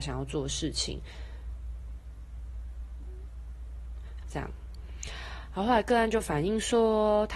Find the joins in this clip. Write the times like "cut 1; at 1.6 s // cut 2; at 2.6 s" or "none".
cut 1; at 4.2 s